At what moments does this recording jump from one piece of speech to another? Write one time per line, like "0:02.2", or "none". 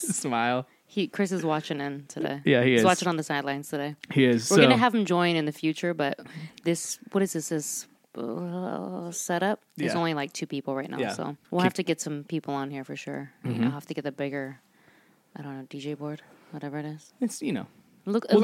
0:11.4